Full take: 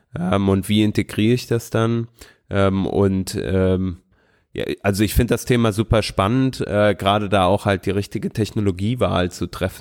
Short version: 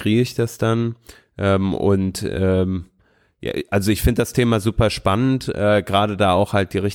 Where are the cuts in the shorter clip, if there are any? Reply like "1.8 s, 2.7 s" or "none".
none

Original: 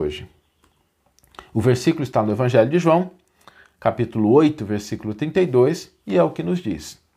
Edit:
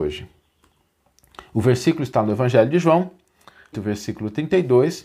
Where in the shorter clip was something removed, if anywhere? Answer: 3.7 s

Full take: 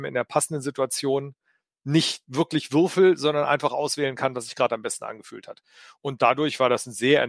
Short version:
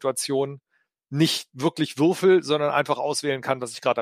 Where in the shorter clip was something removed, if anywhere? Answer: none

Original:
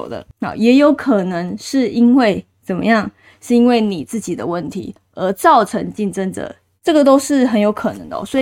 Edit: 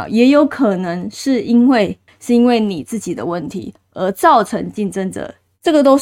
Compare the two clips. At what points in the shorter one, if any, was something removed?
2.1 s

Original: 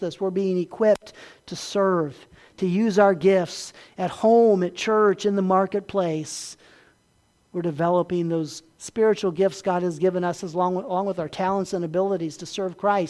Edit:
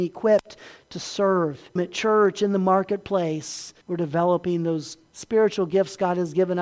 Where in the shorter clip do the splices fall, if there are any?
1.8 s, 3.8 s

